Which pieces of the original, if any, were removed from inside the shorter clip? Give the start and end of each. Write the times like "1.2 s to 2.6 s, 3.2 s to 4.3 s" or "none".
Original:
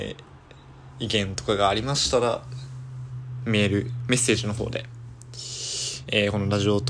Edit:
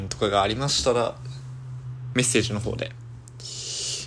3.4 s to 4.1 s